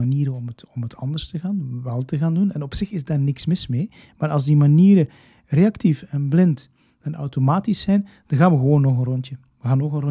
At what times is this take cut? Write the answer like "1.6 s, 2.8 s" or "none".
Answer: none